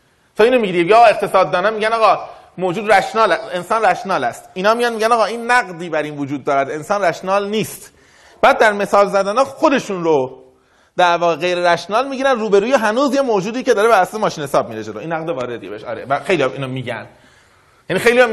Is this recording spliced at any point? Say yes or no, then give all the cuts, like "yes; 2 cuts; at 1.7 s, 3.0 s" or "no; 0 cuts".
no; 0 cuts